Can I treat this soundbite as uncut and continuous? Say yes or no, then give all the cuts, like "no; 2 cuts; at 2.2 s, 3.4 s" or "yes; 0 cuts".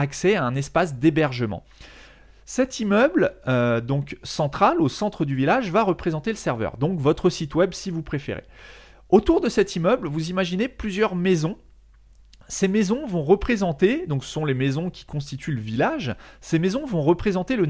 yes; 0 cuts